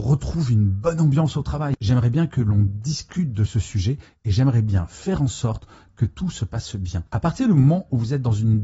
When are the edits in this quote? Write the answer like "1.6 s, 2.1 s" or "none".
7.1 s